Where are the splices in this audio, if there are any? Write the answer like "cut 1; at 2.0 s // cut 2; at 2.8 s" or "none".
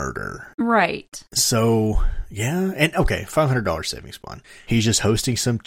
cut 1; at 4.7 s